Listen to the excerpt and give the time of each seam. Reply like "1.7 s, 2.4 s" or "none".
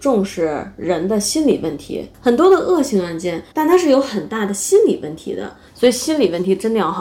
3.5 s, 5.7 s